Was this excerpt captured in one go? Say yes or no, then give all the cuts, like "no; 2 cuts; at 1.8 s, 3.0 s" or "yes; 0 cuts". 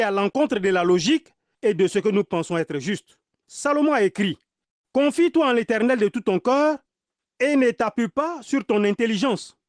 yes; 0 cuts